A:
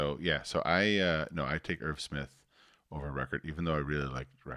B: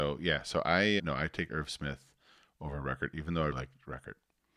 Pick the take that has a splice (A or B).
B